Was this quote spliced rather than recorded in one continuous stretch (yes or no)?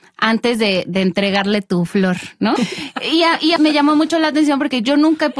yes